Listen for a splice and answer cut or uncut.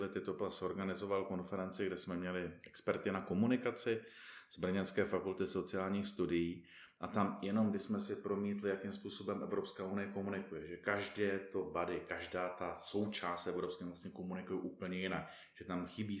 uncut